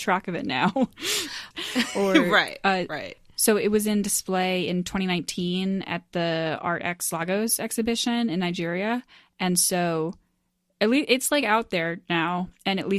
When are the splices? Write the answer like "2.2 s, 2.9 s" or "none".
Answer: 1.5 s